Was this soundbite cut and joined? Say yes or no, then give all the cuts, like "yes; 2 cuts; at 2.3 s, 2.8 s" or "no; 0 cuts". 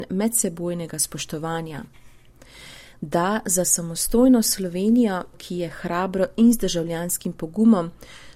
yes; 2 cuts; at 2.9 s, 5.3 s